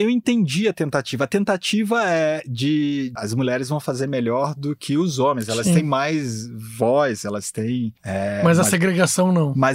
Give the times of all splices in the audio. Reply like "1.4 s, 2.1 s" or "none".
none